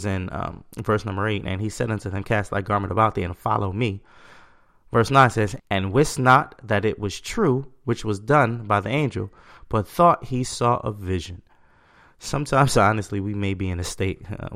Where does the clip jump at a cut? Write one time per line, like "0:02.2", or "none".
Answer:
0:05.6